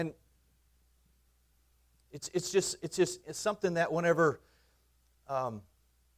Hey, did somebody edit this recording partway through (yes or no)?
no